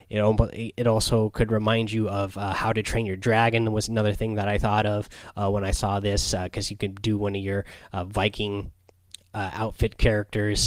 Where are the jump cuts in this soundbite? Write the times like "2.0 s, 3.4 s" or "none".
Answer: none